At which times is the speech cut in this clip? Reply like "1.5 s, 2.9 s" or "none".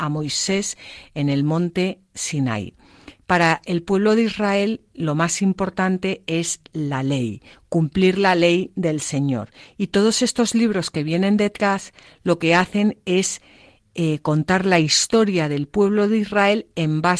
none